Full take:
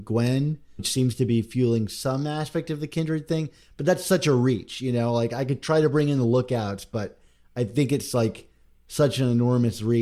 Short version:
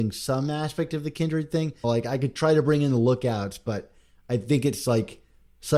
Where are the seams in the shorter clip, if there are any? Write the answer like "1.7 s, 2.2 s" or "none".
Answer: 1.8 s